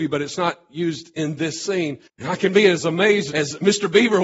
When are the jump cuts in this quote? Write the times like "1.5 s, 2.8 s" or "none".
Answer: 2.1 s, 3.3 s